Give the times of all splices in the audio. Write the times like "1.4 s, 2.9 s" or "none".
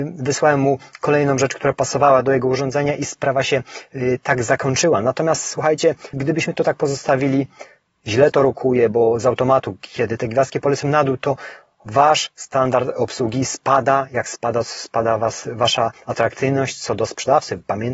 6.1 s